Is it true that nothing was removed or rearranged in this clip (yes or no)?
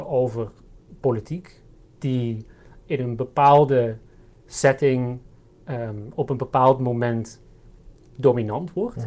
yes